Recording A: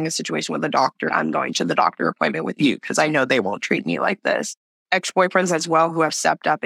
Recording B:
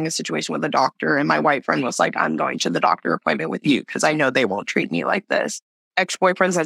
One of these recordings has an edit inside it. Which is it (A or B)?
A